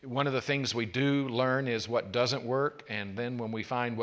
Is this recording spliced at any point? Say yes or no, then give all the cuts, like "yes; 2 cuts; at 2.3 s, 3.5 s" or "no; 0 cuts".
no; 0 cuts